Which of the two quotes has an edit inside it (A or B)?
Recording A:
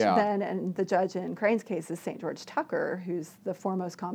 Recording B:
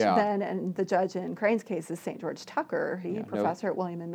B